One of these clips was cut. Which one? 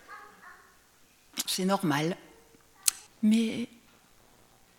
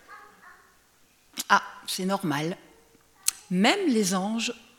first; 2 cuts; at 1.5 s, 3.1 s

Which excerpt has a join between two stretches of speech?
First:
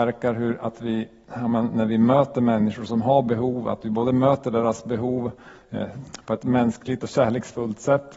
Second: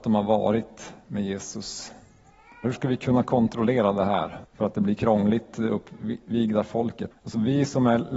second; 3 cuts; at 2.6 s, 4.4 s, 7.1 s

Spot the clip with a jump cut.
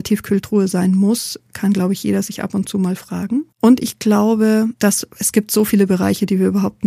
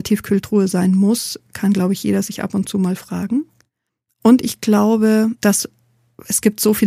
first; 2 cuts; at 3.5 s, 5.1 s

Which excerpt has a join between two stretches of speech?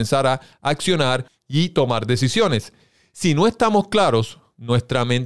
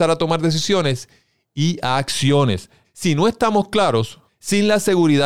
second; 2 cuts; at 2.8 s, 4.3 s

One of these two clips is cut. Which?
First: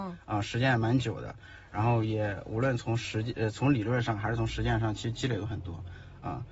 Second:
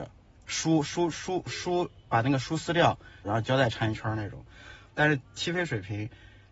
second; 2 cuts; at 3.2 s, 4.9 s

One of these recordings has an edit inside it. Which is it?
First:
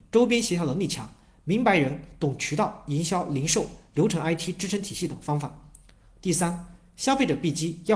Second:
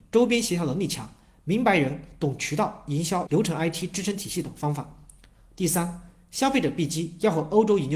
second; 1 cut; at 3.3 s

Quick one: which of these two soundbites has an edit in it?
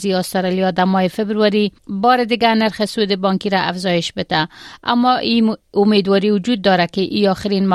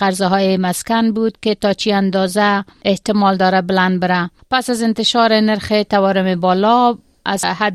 first; 1 cut; at 1.8 s

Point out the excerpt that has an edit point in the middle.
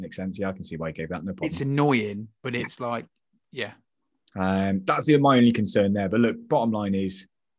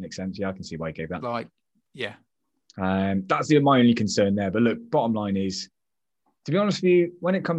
second; 1 cut; at 1.2 s

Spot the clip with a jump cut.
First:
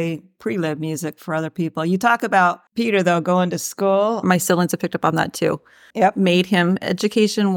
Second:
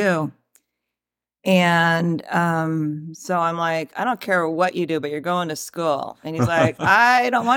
first; 3 cuts; at 2.7 s, 4.2 s, 5.9 s

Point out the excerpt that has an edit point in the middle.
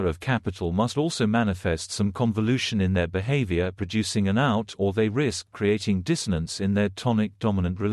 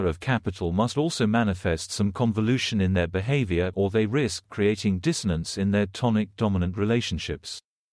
second; 1 cut; at 3.7 s

